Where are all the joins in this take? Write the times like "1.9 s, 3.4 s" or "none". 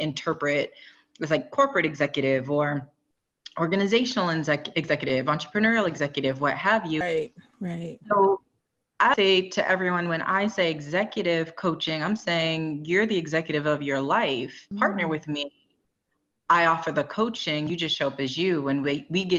7.0 s, 9.1 s, 14.7 s